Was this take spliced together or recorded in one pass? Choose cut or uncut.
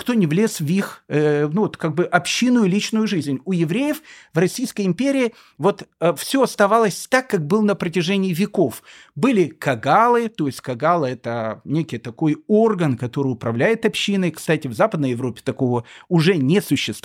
uncut